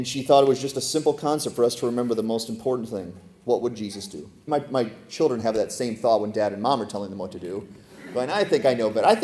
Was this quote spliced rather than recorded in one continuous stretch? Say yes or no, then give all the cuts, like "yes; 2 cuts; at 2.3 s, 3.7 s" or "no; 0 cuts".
yes; 1 cut; at 4.5 s